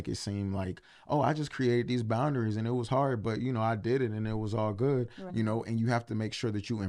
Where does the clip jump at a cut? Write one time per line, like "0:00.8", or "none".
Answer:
0:05.3